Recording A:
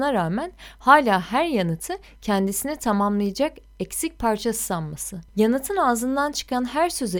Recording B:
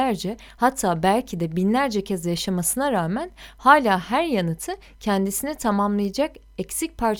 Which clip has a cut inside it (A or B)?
A